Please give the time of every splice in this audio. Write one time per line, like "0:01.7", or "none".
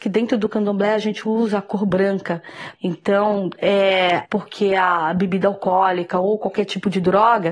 0:02.7
0:04.2